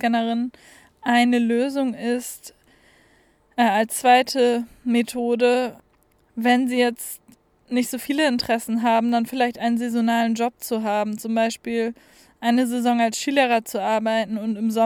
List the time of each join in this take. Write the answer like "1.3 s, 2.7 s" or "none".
none

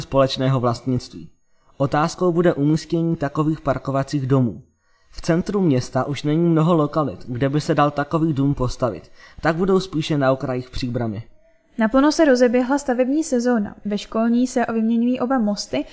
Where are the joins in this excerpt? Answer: none

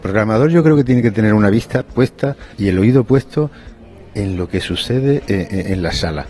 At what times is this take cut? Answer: 2.5 s

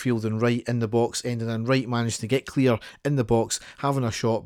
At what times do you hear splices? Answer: none

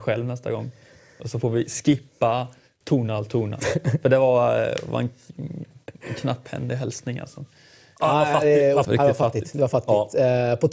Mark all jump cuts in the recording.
8.8 s

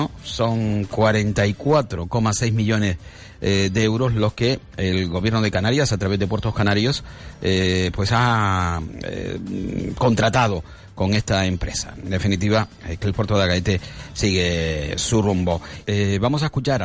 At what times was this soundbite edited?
15.8 s

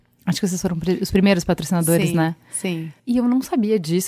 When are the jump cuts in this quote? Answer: 3.0 s

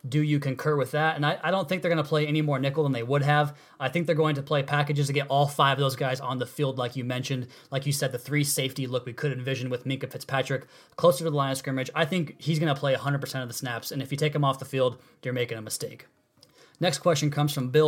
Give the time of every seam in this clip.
none

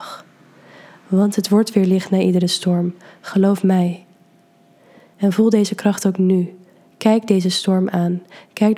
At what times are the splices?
5.1 s

